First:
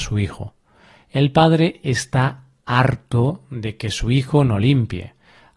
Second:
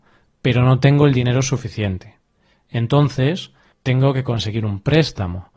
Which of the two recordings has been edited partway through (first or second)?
second